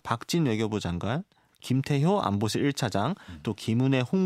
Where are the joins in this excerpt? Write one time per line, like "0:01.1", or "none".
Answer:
0:01.5